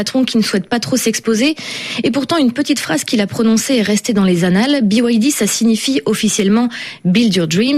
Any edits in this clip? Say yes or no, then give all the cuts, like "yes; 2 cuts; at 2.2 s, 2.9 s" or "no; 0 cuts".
no; 0 cuts